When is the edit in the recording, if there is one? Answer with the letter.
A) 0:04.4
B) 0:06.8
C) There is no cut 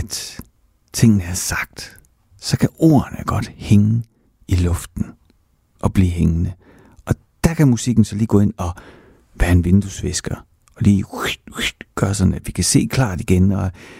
C